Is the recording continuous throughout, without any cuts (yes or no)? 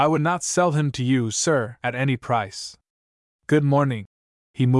yes